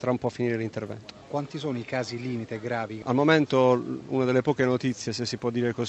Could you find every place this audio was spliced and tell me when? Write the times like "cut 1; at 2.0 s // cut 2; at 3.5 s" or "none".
none